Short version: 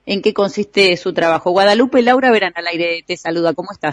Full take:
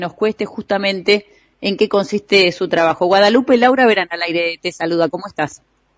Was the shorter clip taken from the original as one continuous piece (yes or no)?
yes